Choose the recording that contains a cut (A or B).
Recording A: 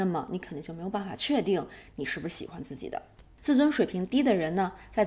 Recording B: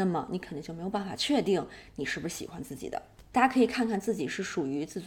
B